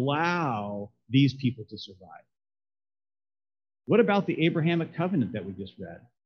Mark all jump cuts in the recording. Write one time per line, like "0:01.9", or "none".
none